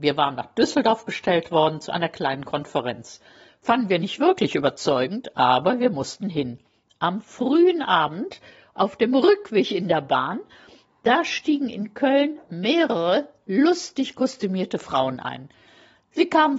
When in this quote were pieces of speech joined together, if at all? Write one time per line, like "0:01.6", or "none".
none

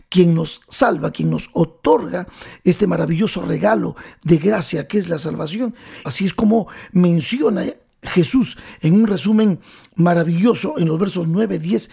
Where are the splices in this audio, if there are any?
0:06.0

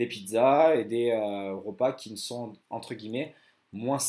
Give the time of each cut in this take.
0:02.6

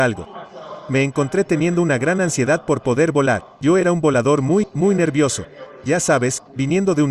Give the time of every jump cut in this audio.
0:03.5

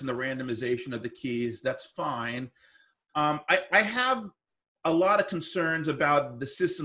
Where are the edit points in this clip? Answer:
none

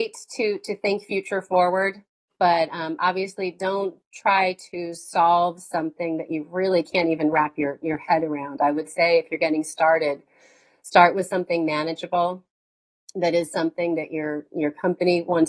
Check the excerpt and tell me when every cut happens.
none

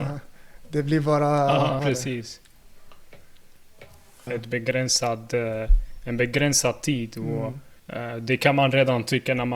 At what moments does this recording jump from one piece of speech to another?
0:01.8
0:04.3
0:07.8

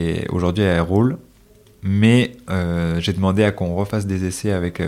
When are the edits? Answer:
none

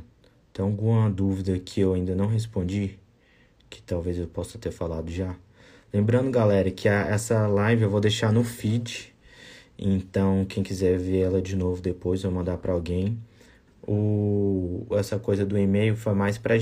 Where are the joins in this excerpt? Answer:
0:13.7
0:14.9

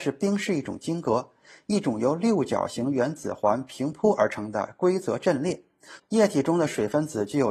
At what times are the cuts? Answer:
0:06.0

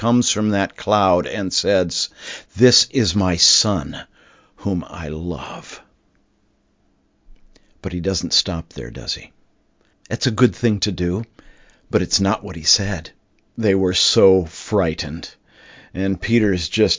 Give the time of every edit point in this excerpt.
0:09.9
0:13.5

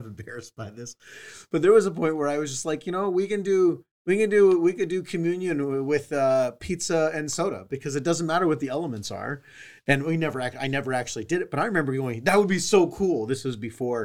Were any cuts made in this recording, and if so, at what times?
none

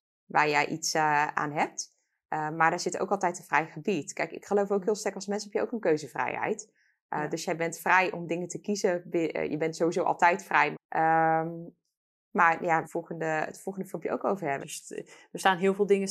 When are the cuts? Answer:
0:10.7
0:12.8
0:14.6

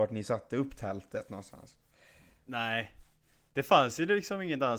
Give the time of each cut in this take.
none

